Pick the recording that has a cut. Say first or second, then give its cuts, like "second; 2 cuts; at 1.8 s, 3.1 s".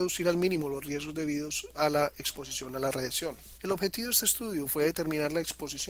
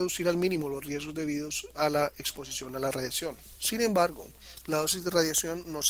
first; 1 cut; at 3.6 s